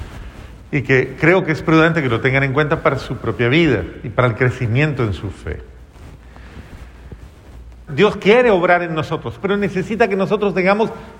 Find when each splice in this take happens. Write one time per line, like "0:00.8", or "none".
0:07.9
0:09.4